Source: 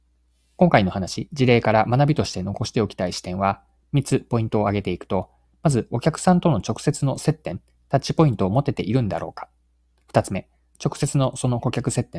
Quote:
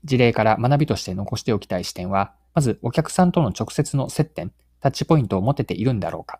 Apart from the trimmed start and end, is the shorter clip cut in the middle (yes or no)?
yes